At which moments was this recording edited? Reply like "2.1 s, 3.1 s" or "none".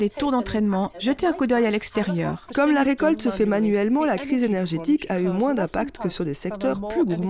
0.9 s, 2.5 s